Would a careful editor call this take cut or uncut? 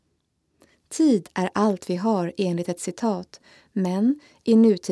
uncut